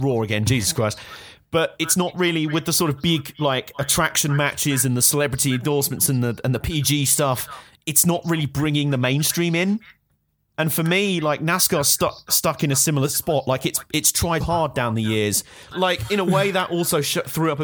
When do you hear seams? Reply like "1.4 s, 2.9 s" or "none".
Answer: 14.4 s, 15.7 s